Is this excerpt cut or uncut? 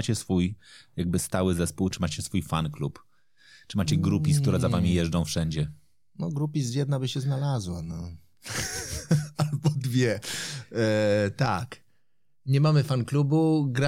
uncut